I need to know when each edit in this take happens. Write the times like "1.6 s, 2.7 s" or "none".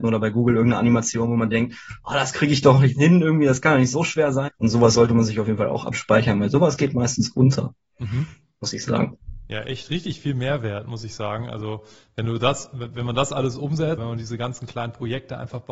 4.5 s, 14.0 s